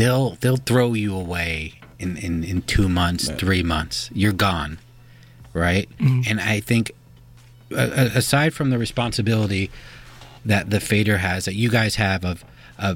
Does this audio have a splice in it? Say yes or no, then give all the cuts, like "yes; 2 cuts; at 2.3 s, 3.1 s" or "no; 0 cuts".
no; 0 cuts